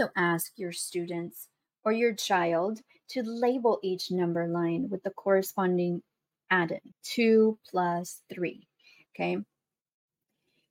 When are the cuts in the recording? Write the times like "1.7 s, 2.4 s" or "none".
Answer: 6.9 s, 9.1 s